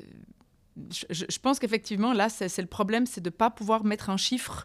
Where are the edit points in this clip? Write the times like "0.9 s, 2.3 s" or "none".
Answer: none